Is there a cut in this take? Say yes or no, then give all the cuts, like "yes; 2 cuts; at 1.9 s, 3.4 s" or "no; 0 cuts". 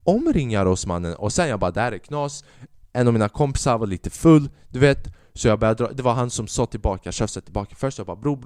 no; 0 cuts